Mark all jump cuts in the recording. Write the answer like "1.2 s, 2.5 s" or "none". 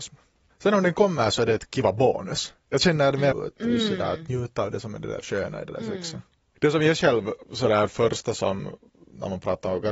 3.3 s